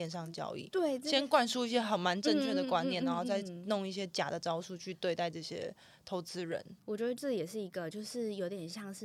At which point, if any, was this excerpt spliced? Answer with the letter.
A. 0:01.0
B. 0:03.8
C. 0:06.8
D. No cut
D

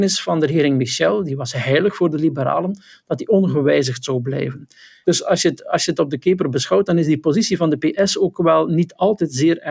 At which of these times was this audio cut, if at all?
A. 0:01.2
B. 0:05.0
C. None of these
B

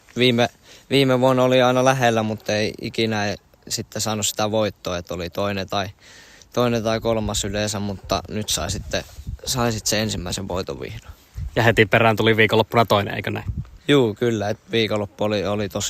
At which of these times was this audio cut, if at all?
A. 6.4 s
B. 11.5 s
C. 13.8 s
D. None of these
D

